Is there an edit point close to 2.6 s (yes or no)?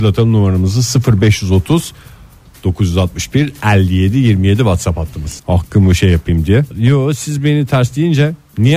no